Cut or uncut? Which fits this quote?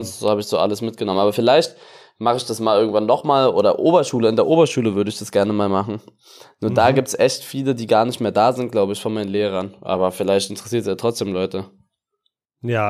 uncut